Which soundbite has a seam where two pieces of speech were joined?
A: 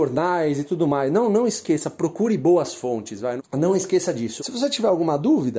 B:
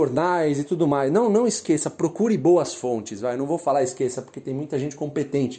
A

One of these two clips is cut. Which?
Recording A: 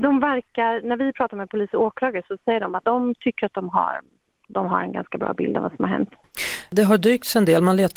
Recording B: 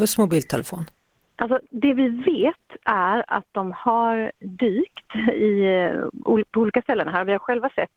A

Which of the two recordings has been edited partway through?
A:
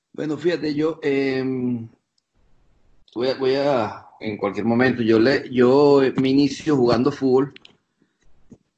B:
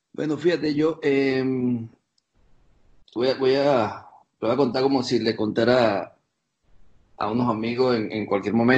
A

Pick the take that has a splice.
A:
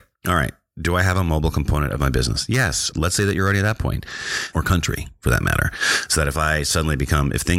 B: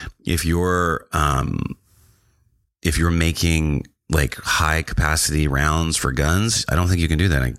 A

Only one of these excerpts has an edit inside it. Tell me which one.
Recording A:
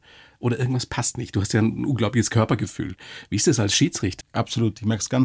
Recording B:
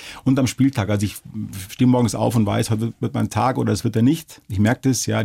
A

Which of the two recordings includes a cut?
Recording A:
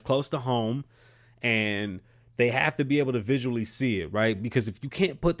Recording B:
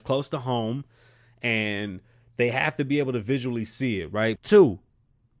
B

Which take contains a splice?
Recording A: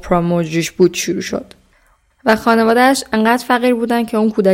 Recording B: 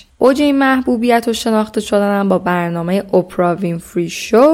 A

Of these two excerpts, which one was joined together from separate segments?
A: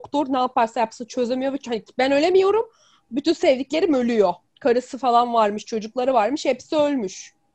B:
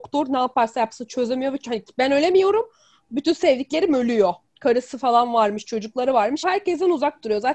B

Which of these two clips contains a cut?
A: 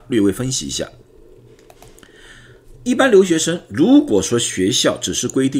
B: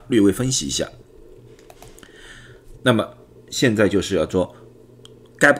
B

